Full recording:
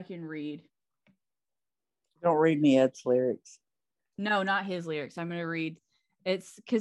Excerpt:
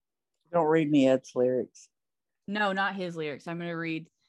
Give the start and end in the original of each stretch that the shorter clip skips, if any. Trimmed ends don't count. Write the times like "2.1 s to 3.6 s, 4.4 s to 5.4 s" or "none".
none